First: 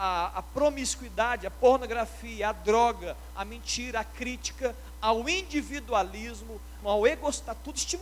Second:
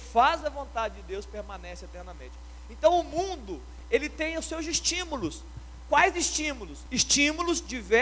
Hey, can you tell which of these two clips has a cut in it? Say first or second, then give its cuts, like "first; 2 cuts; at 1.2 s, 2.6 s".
first; 1 cut; at 6.8 s